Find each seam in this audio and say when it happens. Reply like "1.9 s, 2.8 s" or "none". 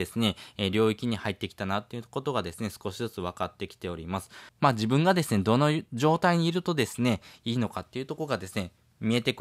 4.5 s